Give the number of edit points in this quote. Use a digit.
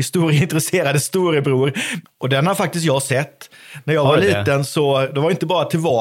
1